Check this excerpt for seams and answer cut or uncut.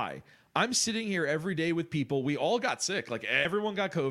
uncut